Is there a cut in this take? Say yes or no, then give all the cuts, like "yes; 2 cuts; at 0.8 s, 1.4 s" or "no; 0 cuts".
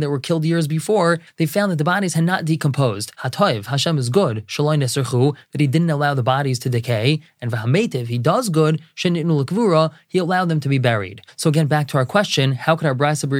yes; 1 cut; at 3.1 s